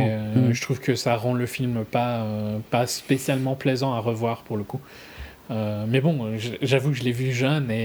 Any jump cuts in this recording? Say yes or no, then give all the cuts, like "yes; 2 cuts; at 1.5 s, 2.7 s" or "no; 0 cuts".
no; 0 cuts